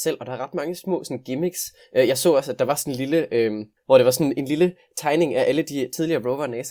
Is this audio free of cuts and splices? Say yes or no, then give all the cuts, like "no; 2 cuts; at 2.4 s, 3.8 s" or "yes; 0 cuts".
no; 1 cut; at 3.8 s